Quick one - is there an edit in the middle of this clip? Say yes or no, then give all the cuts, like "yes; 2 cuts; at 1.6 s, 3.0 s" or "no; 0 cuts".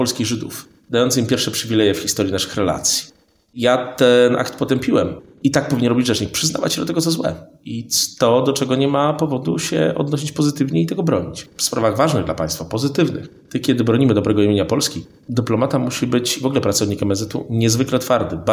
no; 0 cuts